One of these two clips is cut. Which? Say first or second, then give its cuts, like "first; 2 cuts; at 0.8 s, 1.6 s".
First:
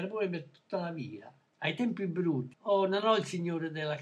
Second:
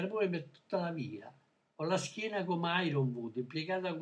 first; 2 cuts; at 1.5 s, 2.5 s